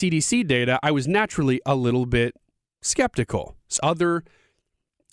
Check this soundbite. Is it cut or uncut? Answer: cut